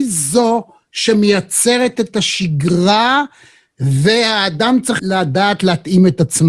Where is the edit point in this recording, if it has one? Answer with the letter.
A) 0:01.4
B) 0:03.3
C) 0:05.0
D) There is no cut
C